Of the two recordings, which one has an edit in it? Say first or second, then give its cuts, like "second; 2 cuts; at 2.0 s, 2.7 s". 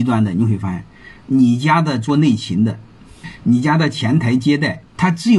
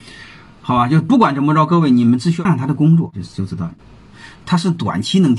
second; 1 cut; at 2.5 s